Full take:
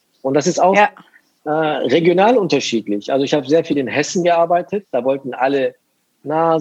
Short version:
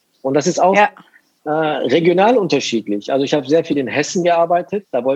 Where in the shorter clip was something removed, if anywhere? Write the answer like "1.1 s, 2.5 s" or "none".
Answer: none